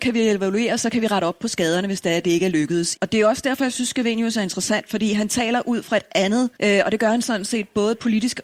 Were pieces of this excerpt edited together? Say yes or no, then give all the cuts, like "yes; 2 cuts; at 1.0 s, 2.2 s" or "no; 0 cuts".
yes; 2 cuts; at 3.0 s, 6.6 s